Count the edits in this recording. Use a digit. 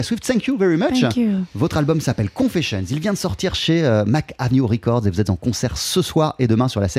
0